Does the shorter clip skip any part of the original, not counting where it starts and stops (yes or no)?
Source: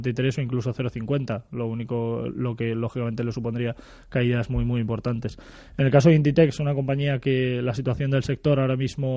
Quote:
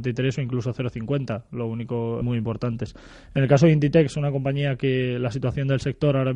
yes